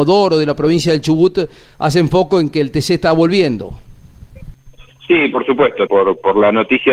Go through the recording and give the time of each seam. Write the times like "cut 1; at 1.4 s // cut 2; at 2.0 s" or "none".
cut 1; at 5.9 s